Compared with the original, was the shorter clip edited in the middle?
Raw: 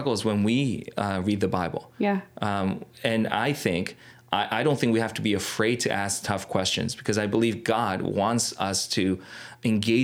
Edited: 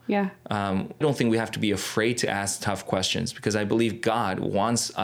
yes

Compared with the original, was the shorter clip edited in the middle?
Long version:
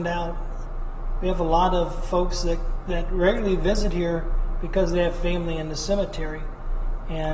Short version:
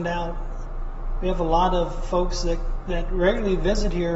no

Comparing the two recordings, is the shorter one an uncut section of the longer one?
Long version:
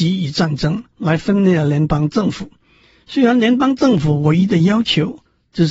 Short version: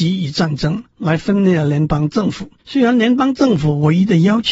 no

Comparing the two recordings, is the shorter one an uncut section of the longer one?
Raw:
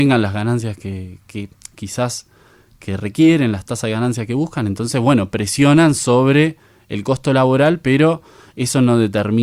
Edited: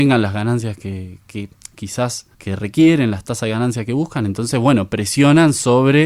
no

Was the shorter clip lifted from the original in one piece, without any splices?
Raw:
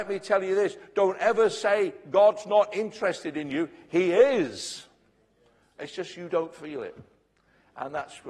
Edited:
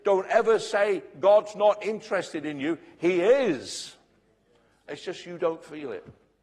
yes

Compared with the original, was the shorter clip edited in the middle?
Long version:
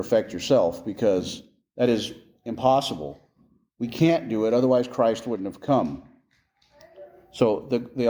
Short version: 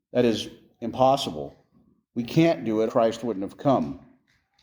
yes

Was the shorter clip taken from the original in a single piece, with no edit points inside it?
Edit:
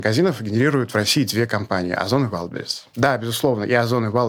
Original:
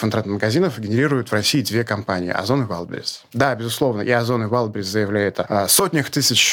yes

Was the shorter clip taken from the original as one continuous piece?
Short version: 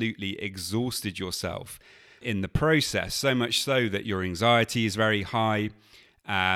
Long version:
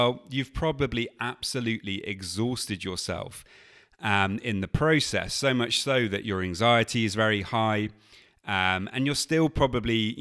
no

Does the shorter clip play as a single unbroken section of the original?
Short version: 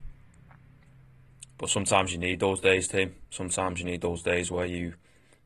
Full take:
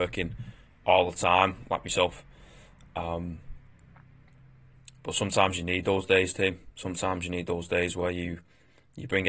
yes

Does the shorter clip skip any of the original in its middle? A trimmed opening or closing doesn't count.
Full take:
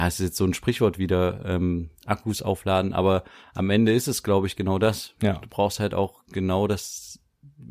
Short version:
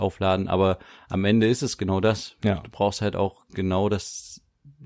yes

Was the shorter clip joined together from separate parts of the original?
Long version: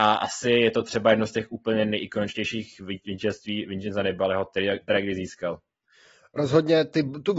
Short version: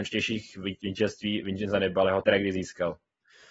yes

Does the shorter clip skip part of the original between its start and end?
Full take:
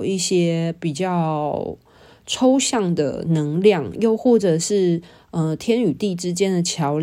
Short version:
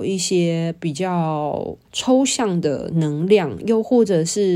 yes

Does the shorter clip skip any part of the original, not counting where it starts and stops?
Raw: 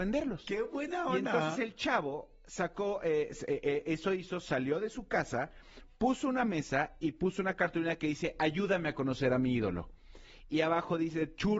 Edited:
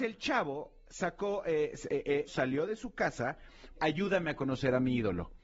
yes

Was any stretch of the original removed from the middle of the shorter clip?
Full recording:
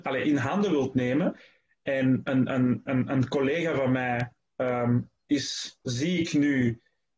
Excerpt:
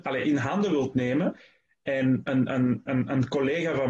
no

